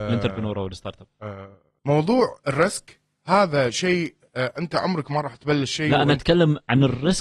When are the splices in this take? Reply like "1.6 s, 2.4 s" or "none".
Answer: none